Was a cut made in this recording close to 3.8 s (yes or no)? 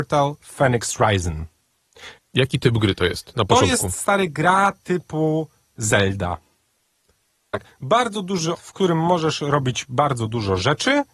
no